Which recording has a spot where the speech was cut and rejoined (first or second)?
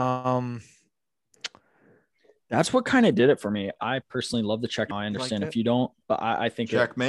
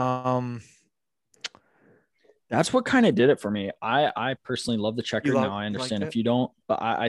first